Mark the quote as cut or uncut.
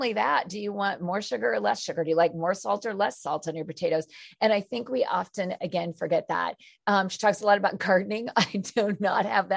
uncut